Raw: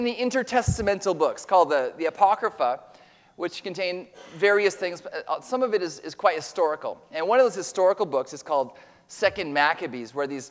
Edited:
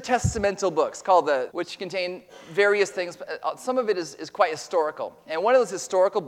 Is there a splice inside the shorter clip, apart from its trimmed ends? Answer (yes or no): yes